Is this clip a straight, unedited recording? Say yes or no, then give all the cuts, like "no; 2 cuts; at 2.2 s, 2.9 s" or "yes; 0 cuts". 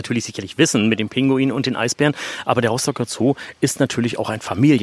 yes; 0 cuts